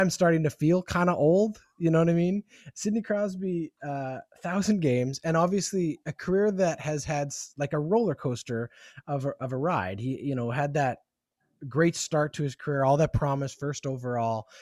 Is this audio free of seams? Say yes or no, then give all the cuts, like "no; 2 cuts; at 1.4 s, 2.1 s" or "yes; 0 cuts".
yes; 0 cuts